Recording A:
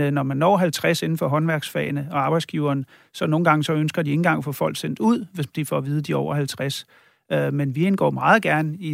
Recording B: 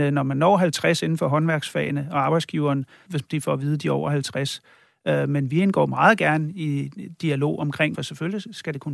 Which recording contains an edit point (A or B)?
B